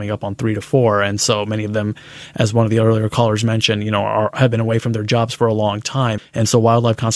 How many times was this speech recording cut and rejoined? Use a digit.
1